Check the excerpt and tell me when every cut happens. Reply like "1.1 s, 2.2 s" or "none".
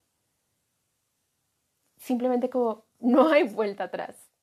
none